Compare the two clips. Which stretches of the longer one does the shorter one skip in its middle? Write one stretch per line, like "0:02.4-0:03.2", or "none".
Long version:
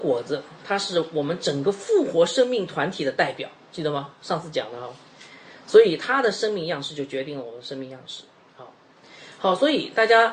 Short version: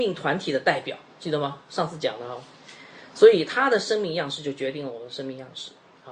none